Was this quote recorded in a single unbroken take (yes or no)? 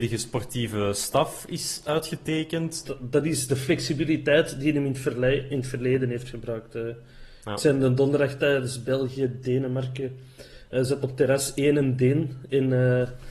no